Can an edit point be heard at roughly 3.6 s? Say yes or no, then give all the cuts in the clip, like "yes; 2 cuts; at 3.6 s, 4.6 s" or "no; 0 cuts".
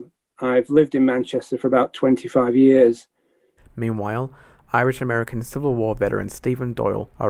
yes; 1 cut; at 3.6 s